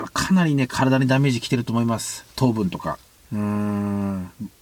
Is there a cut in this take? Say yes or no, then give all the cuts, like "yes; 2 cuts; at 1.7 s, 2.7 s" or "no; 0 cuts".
yes; 1 cut; at 3.2 s